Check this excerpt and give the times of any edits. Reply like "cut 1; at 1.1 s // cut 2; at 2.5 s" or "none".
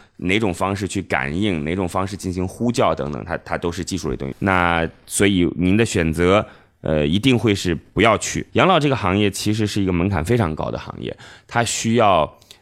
cut 1; at 4.3 s // cut 2; at 8.5 s